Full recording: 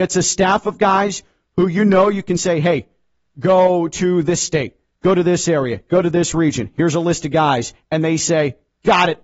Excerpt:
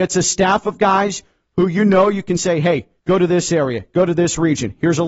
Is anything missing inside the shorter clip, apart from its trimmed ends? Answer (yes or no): yes